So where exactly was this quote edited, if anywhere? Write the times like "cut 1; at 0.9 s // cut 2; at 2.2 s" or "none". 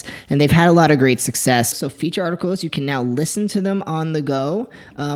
cut 1; at 1.7 s